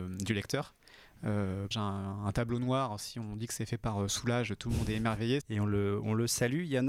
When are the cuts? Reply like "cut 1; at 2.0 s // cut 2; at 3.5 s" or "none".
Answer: cut 1; at 1.7 s // cut 2; at 5.4 s